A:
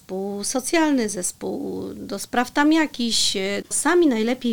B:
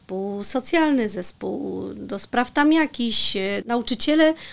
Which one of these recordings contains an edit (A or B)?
A